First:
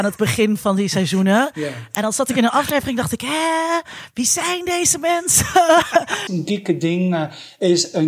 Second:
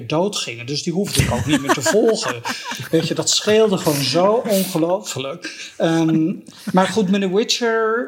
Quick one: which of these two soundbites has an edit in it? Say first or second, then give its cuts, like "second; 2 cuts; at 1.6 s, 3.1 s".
first; 1 cut; at 6.3 s